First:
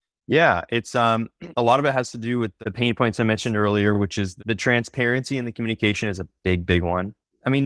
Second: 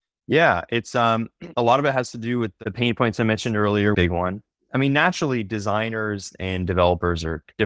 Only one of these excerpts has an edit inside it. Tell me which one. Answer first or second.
second